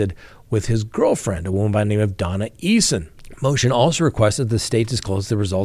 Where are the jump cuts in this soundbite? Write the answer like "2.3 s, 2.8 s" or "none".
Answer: none

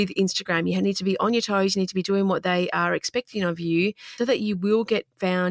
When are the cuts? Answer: 4.2 s

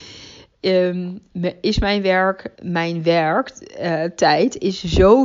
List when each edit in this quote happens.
2.5 s

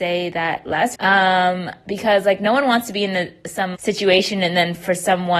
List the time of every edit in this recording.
0.9 s, 3.7 s

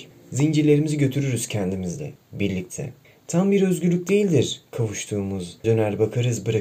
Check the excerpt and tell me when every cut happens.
5.6 s

